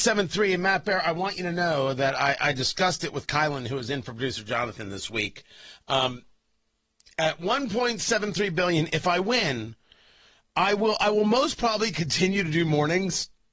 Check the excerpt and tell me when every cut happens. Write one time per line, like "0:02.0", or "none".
none